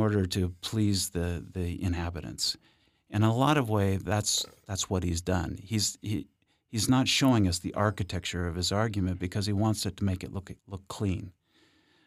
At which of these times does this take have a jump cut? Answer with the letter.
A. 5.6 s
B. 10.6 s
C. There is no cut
B